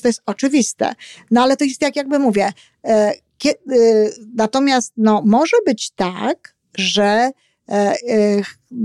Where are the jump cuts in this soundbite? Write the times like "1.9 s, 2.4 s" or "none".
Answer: none